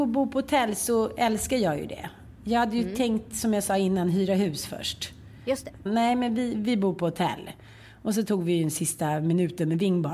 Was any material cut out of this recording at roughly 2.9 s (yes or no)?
no